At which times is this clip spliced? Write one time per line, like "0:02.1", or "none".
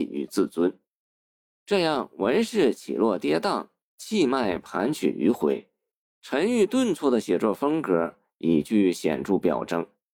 none